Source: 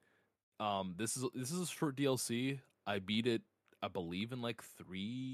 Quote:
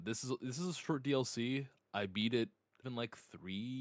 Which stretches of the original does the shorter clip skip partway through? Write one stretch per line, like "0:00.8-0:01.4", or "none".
0:03.8-0:04.3

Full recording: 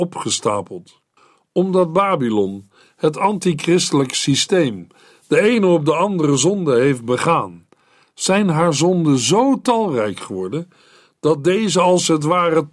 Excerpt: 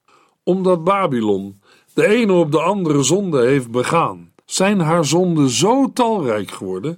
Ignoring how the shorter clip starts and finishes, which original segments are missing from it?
0:02.9-0:05.2
0:07.7-0:08.1

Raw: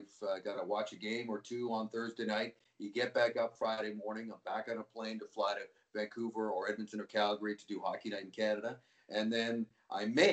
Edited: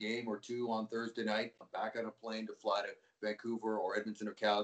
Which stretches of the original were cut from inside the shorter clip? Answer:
0:02.6-0:04.3

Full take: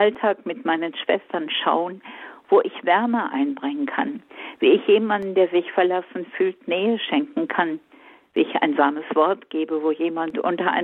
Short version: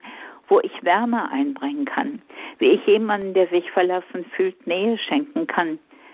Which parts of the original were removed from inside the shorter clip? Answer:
none

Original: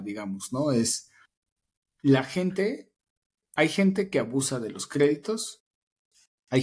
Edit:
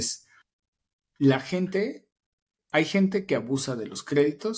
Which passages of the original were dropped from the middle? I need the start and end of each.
none

